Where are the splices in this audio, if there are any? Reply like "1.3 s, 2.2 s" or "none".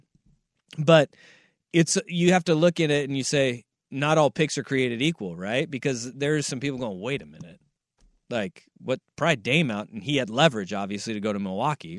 none